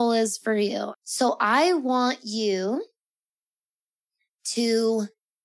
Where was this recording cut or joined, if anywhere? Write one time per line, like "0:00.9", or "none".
0:00.9